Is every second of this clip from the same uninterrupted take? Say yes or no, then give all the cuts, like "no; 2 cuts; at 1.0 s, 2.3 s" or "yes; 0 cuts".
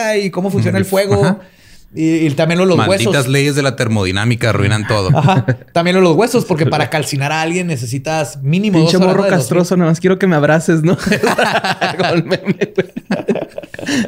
yes; 0 cuts